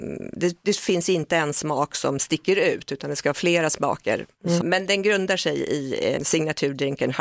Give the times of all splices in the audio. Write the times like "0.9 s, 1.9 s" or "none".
4.6 s, 6.2 s